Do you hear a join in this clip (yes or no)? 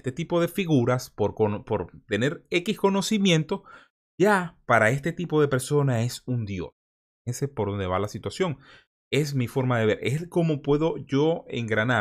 no